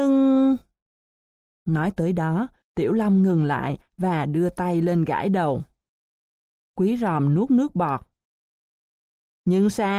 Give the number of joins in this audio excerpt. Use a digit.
0